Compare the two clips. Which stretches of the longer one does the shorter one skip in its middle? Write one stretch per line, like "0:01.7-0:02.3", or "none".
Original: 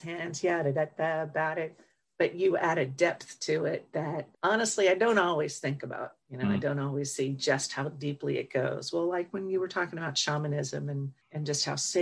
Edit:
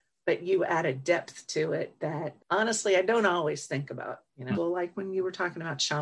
0:06.5-0:08.9